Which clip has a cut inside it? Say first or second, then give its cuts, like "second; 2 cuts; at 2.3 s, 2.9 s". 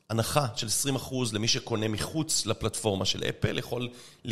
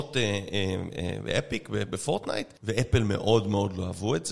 second; 1 cut; at 2.6 s